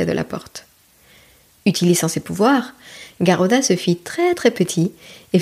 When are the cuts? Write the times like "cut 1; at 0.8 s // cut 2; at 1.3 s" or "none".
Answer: none